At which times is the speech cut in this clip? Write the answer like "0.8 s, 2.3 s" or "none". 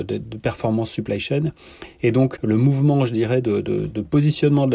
2.4 s